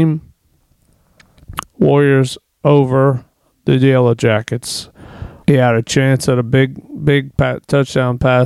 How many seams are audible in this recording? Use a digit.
2